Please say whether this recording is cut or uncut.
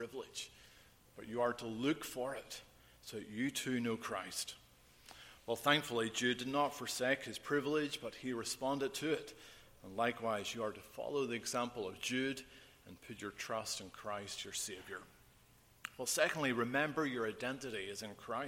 uncut